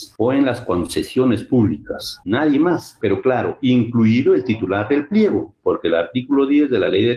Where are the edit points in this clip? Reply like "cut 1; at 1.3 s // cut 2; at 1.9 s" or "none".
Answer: cut 1; at 2.2 s